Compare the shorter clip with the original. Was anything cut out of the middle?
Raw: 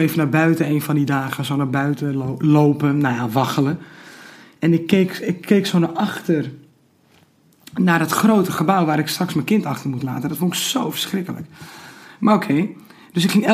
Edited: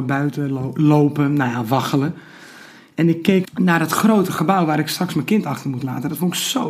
yes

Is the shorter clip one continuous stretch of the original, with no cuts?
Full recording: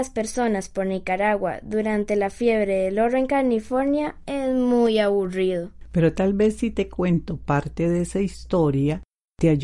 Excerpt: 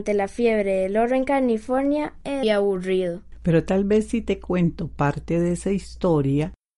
no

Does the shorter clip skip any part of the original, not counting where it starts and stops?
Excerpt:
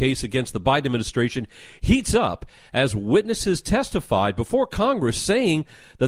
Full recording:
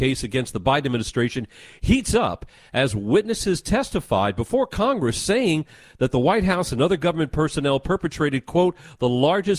no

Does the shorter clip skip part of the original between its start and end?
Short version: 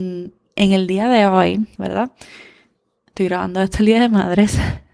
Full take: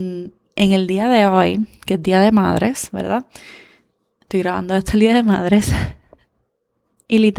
yes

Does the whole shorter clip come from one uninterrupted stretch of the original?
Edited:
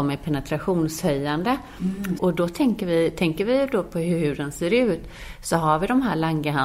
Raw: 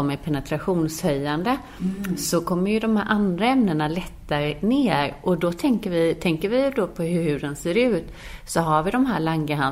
no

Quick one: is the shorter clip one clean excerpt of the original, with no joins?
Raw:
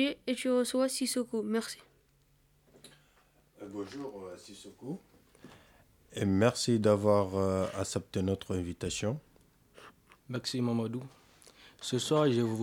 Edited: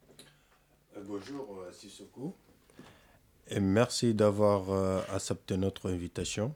yes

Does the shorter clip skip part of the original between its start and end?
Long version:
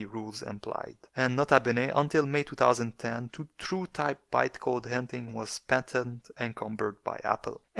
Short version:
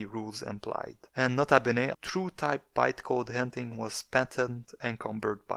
yes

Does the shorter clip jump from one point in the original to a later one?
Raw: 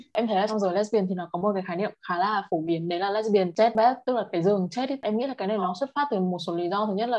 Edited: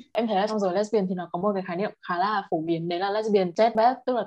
no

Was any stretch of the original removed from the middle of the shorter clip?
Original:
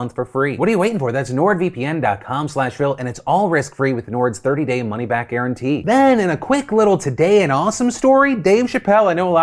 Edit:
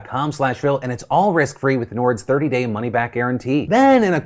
no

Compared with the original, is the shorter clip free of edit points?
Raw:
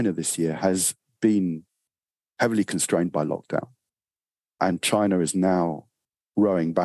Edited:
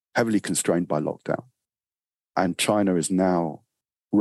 yes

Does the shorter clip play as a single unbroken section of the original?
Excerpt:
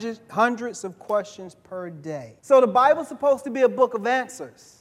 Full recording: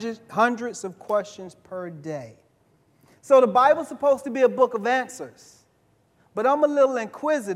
no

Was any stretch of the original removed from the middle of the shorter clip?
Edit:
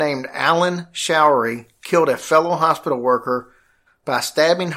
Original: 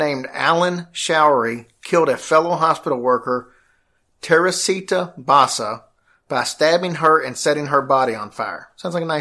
yes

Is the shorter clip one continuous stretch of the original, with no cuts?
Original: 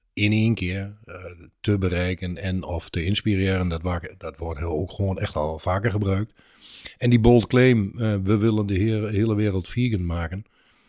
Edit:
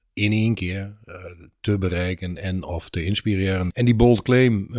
no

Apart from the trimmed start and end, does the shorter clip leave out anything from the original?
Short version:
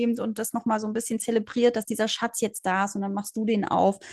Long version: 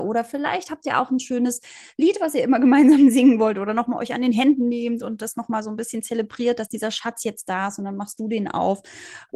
no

